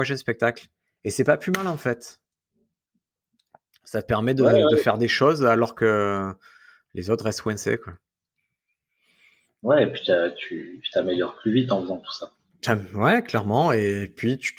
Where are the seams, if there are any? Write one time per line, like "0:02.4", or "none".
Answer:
none